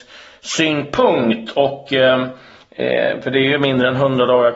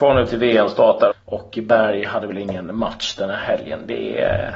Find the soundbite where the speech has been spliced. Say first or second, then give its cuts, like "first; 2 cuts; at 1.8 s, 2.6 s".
second; 1 cut; at 1.1 s